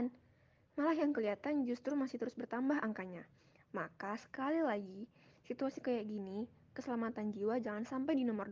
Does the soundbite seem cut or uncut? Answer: uncut